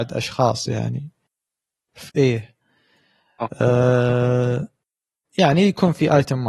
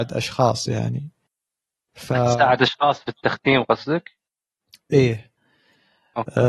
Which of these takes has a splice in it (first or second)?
first